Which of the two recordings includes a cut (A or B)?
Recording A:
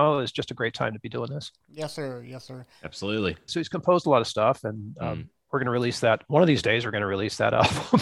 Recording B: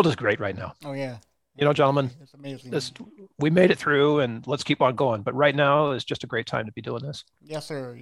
A